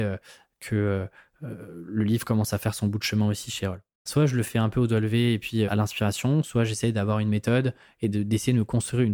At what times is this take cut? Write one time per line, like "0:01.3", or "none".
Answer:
0:04.1
0:05.7